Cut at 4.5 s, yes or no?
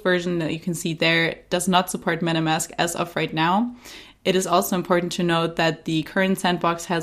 no